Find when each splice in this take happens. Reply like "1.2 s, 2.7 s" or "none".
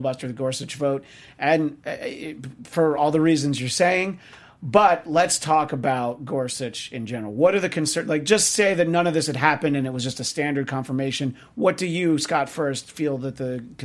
none